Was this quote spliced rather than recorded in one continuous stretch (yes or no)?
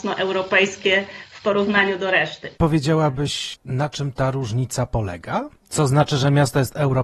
yes